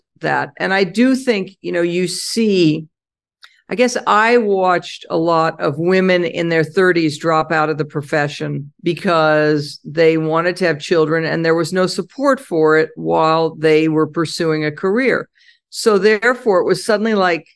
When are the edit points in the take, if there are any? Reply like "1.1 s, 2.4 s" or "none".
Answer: 8.7 s